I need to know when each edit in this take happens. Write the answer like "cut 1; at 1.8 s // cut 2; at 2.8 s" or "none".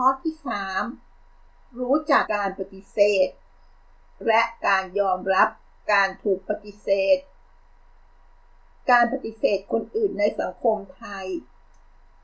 cut 1; at 2.2 s